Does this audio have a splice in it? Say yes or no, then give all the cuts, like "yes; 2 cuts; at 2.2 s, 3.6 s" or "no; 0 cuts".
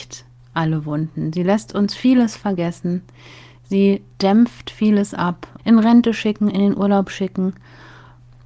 yes; 1 cut; at 5.6 s